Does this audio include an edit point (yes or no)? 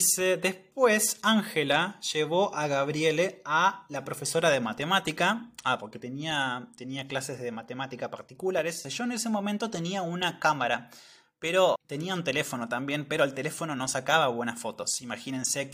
yes